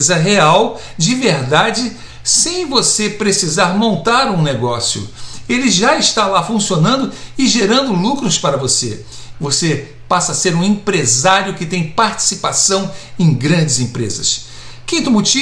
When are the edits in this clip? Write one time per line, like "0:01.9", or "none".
0:09.3